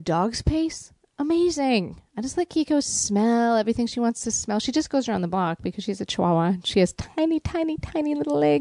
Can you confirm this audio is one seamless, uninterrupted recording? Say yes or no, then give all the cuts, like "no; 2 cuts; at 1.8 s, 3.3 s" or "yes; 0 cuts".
yes; 0 cuts